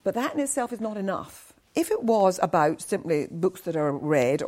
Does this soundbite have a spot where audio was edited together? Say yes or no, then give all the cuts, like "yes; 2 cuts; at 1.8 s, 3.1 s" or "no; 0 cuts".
yes; 1 cut; at 1.7 s